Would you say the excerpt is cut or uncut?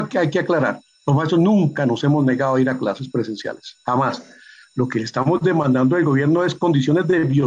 uncut